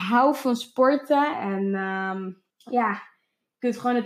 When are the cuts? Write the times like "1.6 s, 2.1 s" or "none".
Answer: 1.3 s, 2.5 s